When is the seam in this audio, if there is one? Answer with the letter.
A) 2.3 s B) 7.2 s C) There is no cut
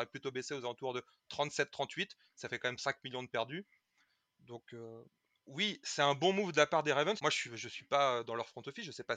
B